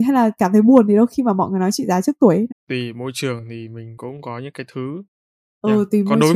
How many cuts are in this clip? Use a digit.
1